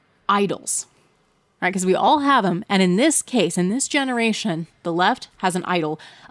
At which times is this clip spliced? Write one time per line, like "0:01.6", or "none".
none